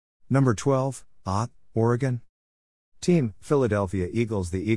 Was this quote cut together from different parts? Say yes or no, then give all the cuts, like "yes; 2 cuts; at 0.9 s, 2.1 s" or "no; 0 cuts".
yes; 1 cut; at 1.2 s